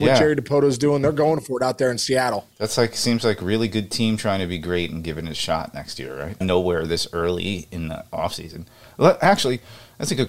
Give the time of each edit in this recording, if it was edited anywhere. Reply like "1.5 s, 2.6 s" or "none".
6.4 s